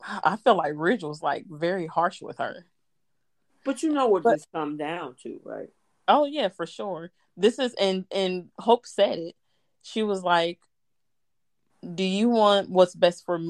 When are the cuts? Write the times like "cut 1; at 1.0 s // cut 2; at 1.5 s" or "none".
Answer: none